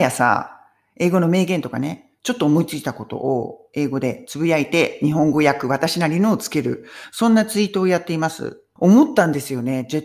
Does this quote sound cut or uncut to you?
cut